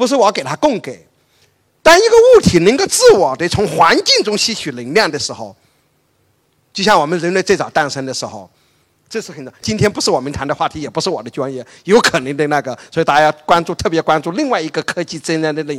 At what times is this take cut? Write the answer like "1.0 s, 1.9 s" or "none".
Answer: 9.6 s